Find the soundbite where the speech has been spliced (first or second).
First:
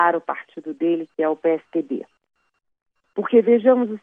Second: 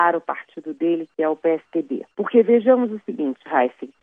second